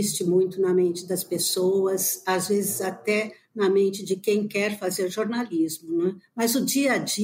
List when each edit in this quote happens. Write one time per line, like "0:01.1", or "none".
none